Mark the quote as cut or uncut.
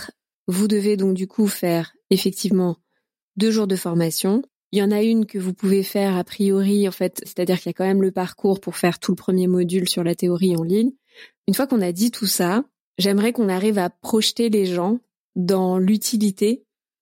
cut